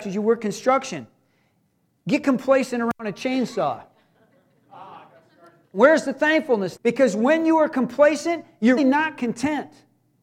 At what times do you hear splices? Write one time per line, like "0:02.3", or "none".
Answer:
0:05.6
0:06.8
0:08.8